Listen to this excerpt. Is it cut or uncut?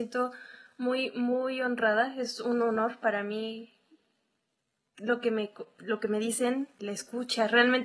cut